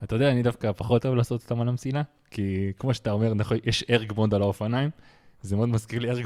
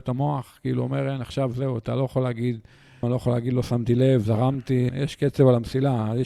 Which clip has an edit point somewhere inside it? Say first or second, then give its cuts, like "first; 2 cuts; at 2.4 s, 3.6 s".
second; 2 cuts; at 3.0 s, 4.9 s